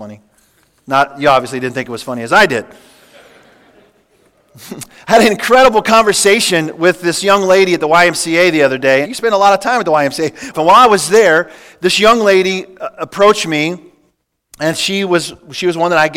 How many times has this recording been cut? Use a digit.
2